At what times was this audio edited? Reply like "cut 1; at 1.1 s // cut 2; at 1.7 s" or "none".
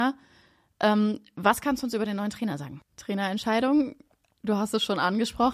cut 1; at 2.9 s